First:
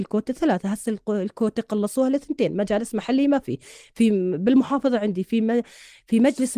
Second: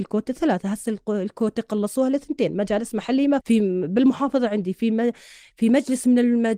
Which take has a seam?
second; 1 cut; at 3.4 s

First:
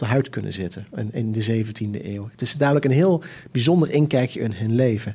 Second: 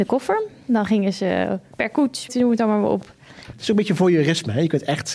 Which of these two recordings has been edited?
second; 2 cuts; at 2.3 s, 3.5 s

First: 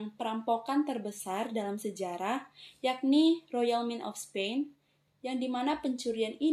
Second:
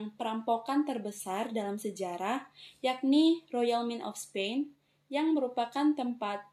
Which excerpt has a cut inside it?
first; 1 cut; at 5.1 s

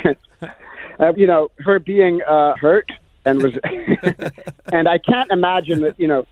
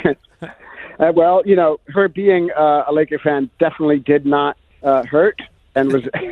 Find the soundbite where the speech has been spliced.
first; 2 cuts; at 1.1 s, 2.6 s

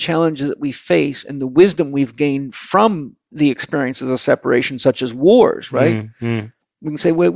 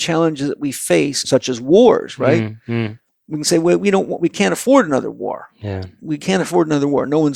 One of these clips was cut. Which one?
second; 1 cut; at 1.2 s

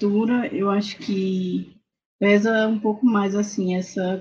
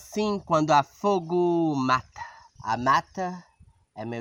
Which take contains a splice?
second; 1 cut; at 2.6 s

